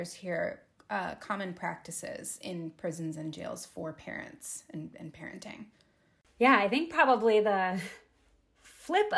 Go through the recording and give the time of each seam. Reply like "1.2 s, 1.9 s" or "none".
none